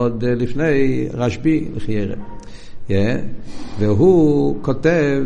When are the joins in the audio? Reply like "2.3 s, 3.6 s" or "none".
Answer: none